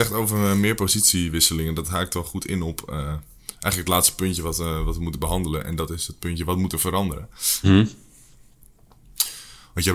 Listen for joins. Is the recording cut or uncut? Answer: cut